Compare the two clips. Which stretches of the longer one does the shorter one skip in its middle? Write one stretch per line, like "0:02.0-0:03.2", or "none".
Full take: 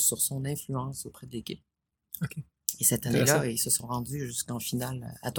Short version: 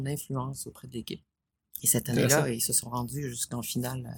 0:02.2-0:02.8